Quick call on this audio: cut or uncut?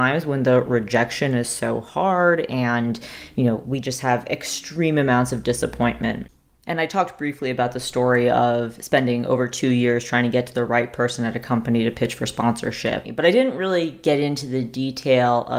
cut